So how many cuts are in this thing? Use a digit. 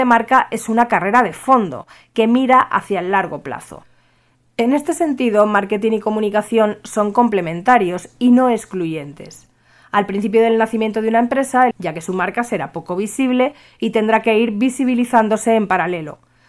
1